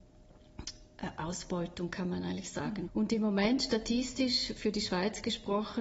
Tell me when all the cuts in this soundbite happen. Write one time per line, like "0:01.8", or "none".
0:02.9